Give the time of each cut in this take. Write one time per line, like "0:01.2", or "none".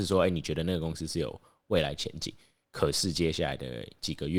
none